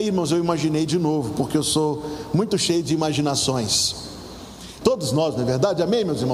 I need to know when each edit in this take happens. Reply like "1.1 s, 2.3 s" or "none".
4.8 s